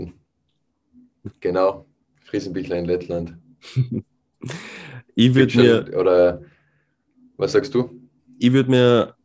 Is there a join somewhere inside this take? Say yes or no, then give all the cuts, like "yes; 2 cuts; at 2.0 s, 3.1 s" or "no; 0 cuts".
yes; 1 cut; at 1.3 s